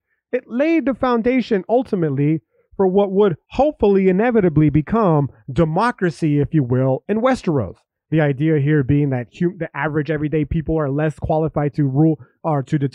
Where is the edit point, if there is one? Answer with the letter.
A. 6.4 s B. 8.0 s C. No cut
B